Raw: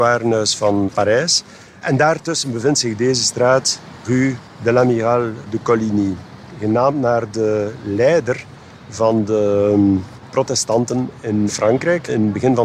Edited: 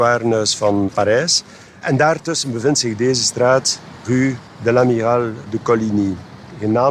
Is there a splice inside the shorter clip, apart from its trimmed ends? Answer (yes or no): no